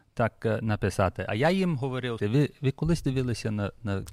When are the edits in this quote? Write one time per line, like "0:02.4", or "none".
0:02.2